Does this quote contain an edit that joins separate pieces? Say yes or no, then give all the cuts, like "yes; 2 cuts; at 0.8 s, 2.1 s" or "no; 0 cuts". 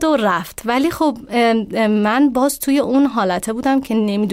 no; 0 cuts